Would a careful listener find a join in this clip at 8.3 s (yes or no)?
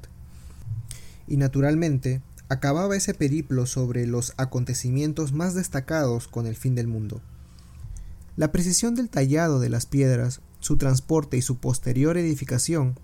yes